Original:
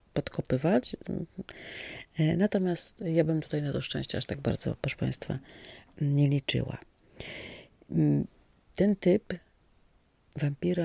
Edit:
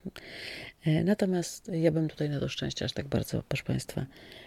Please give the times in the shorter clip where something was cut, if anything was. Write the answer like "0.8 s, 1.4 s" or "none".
none